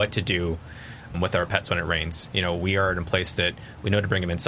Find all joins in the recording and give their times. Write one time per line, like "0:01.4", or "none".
0:01.1